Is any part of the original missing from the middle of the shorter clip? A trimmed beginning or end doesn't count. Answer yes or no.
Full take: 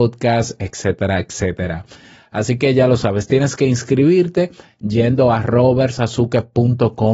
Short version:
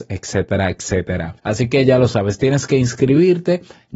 yes